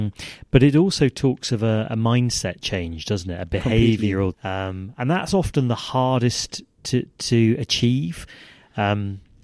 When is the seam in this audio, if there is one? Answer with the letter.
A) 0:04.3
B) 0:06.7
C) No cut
A